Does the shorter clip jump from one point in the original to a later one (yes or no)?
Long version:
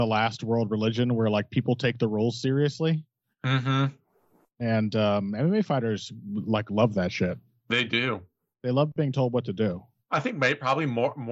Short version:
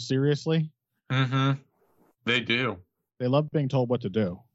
yes